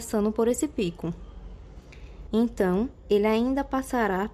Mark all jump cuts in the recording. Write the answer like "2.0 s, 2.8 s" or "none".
2.3 s